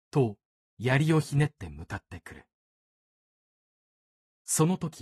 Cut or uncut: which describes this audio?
uncut